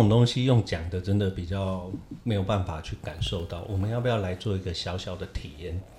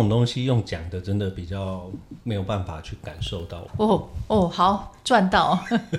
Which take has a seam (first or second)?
second